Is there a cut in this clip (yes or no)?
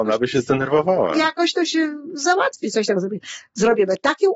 yes